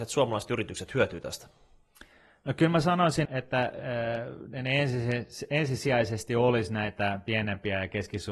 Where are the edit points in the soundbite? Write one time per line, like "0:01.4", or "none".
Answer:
0:03.3